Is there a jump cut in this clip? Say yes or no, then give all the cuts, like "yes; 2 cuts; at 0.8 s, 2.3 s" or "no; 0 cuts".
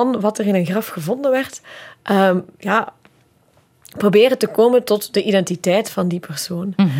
no; 0 cuts